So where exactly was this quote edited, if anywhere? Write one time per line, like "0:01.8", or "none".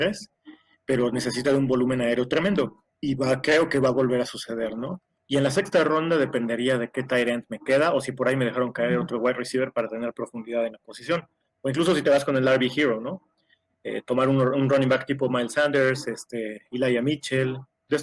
0:05.2